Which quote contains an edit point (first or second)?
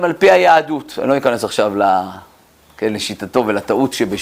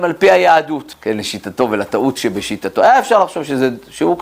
second